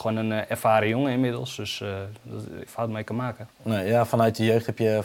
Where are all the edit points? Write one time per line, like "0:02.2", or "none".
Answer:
0:02.7